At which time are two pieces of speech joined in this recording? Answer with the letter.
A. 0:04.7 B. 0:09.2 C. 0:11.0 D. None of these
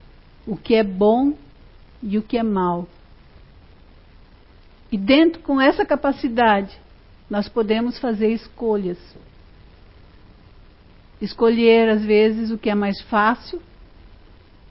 D